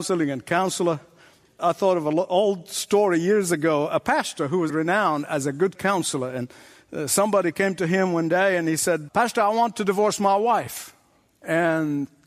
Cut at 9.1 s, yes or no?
yes